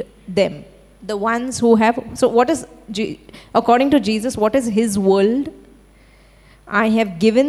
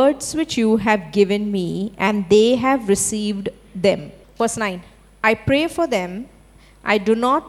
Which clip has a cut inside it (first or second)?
second